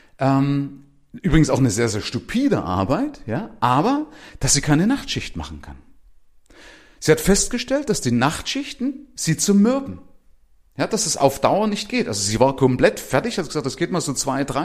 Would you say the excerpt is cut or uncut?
uncut